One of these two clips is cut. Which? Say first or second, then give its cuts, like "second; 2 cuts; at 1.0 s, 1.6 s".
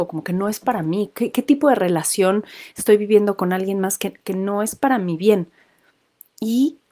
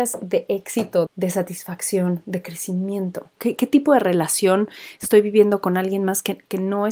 second; 2 cuts; at 1.1 s, 3.4 s